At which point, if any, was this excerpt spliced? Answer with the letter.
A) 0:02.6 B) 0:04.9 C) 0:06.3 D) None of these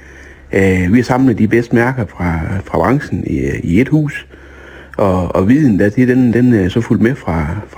D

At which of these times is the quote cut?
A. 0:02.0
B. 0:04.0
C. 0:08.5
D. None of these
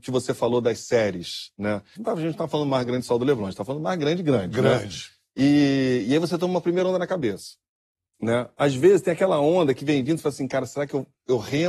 A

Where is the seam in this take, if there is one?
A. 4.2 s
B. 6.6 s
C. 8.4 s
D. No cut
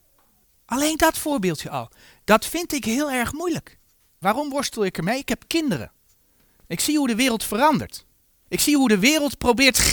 A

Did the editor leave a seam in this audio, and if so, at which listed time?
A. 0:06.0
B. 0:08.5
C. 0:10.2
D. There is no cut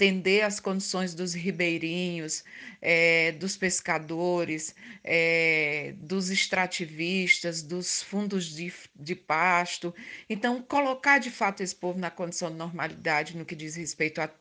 D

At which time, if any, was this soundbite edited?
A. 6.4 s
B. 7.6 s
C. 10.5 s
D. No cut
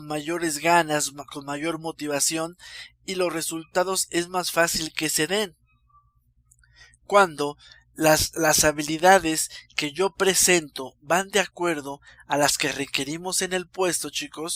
D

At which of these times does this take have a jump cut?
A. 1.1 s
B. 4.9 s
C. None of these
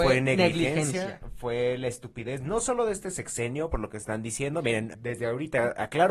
B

